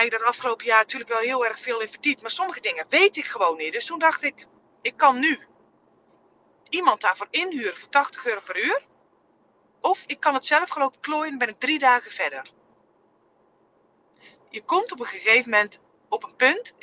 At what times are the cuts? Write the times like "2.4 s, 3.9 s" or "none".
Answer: none